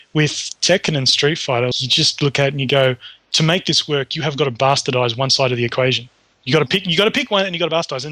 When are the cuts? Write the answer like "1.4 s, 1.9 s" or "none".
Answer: 1.7 s